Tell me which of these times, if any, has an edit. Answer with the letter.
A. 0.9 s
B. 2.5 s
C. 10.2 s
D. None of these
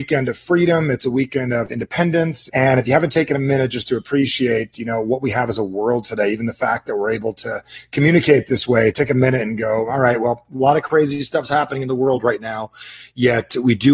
B